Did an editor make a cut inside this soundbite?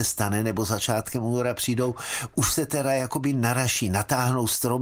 no; 0 cuts

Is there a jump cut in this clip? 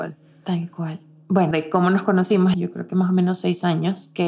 yes; 2 cuts; at 1.5 s, 2.5 s

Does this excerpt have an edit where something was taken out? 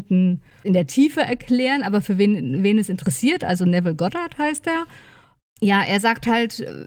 no; 0 cuts

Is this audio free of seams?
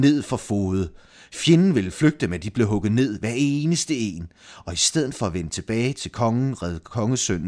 yes; 0 cuts

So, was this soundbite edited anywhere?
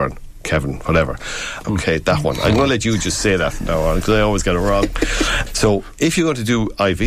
yes; 2 cuts; at 1.6 s, 5.5 s

